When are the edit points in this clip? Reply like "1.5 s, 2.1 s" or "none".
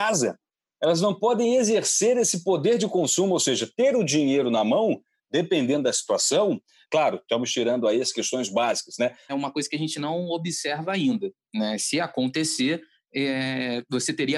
6.8 s, 9.3 s